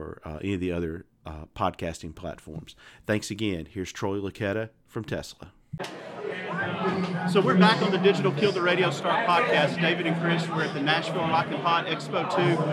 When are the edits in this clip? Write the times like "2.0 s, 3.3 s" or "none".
none